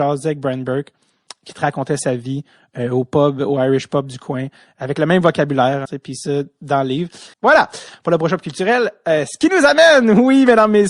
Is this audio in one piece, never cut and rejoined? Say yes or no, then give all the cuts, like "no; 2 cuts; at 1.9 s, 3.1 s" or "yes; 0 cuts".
no; 2 cuts; at 5.8 s, 7.3 s